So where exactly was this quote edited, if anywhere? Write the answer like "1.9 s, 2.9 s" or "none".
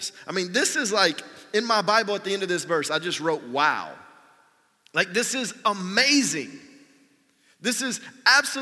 none